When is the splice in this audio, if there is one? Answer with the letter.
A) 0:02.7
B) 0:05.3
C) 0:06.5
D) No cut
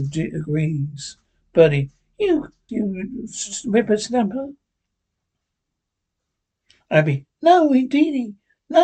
A